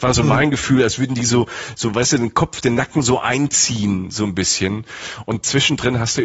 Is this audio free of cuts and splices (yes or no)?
yes